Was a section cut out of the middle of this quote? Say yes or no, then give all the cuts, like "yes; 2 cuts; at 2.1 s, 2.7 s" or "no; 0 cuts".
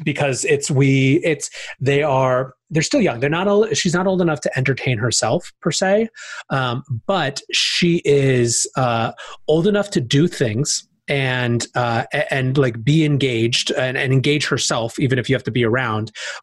no; 0 cuts